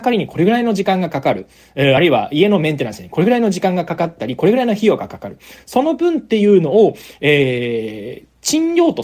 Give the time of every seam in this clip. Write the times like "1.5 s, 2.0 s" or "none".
none